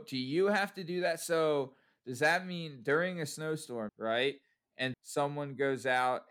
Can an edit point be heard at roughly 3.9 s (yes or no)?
yes